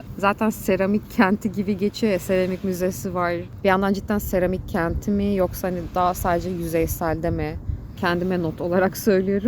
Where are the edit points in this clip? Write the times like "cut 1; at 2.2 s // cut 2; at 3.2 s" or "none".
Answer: cut 1; at 3.6 s // cut 2; at 8.0 s